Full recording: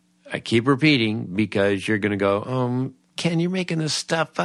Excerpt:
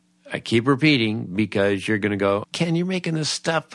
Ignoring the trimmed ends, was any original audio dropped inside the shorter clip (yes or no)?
yes